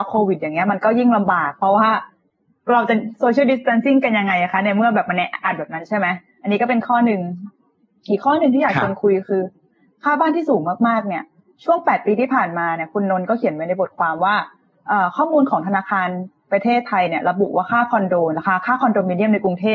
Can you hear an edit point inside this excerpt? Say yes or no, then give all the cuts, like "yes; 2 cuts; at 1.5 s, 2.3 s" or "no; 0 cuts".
yes; 1 cut; at 5.4 s